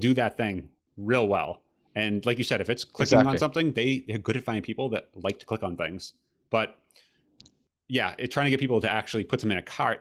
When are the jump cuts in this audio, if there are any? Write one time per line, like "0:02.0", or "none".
none